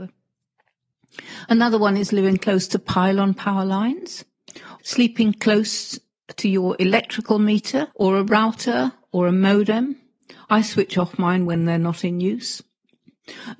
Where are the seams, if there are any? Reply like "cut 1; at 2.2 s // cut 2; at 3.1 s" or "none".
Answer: cut 1; at 4.8 s // cut 2; at 7.9 s